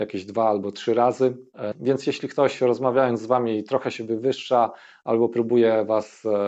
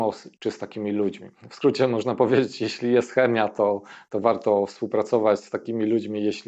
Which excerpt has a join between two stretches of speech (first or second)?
first